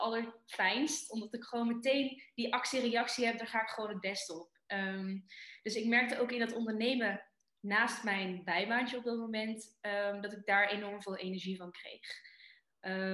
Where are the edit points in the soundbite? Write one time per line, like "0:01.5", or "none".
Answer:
none